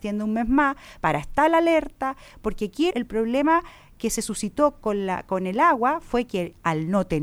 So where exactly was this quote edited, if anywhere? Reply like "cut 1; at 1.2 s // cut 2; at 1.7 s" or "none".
cut 1; at 2.9 s